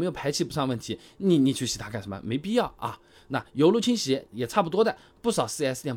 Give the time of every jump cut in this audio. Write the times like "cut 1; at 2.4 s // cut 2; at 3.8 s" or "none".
none